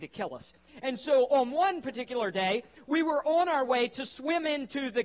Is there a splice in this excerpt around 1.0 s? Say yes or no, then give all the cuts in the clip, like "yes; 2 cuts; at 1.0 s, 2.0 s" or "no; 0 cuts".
no; 0 cuts